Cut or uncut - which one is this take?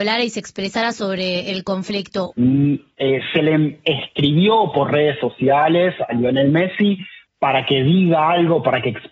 cut